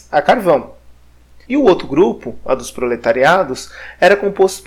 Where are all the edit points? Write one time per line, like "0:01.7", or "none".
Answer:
0:01.4